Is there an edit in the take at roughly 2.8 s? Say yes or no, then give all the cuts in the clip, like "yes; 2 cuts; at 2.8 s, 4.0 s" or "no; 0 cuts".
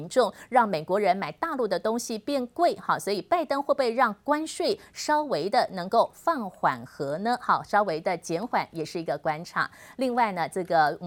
no; 0 cuts